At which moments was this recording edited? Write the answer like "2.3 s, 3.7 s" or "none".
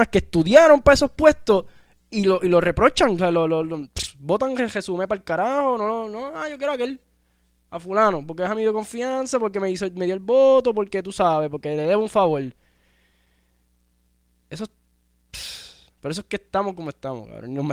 none